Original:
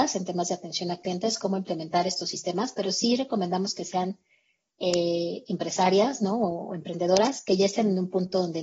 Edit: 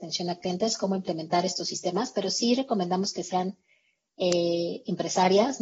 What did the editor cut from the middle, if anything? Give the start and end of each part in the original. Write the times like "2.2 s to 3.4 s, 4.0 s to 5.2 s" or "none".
none